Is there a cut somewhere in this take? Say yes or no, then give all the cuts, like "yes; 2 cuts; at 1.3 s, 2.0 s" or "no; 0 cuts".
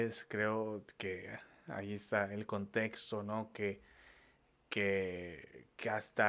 no; 0 cuts